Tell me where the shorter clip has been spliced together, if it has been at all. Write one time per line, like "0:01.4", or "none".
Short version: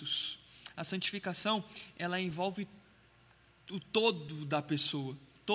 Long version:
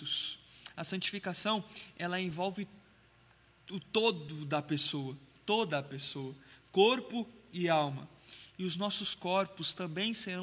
none